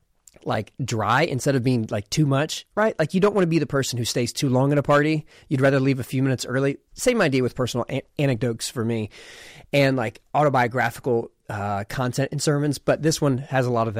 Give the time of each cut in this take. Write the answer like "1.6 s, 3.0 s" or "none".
none